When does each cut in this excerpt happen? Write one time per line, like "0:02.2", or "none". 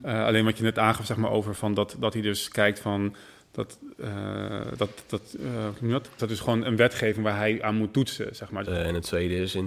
0:05.1
0:06.2
0:08.6